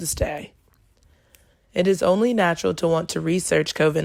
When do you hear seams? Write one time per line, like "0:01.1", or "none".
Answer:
0:01.5